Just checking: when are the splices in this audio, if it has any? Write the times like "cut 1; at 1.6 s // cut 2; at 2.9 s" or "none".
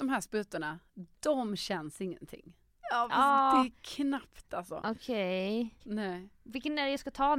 cut 1; at 2.8 s // cut 2; at 5.8 s